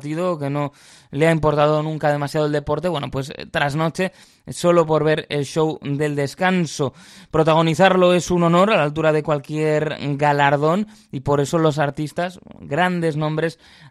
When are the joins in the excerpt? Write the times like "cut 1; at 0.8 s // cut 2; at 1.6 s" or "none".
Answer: none